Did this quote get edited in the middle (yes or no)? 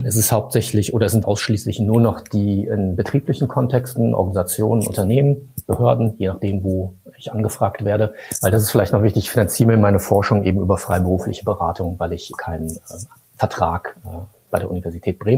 yes